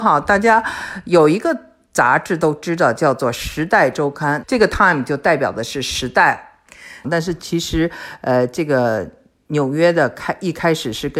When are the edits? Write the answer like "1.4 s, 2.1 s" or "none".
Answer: 4.4 s, 7.0 s